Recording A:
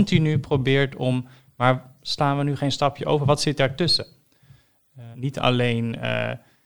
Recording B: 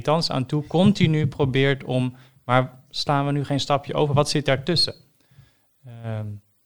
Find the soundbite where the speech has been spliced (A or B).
A